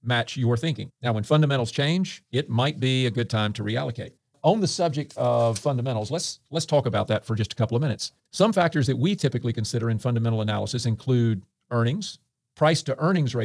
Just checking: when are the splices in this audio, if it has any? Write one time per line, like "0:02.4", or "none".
0:00.9